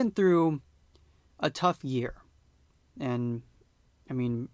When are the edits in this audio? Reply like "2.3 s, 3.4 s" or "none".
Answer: 3.0 s